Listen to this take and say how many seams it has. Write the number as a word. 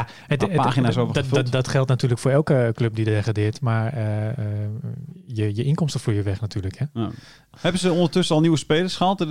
two